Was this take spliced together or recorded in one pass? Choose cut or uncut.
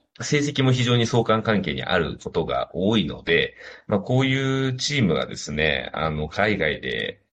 uncut